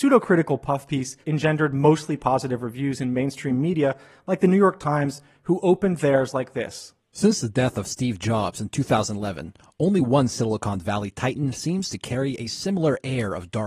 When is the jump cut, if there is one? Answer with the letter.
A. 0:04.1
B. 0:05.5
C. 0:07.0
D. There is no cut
D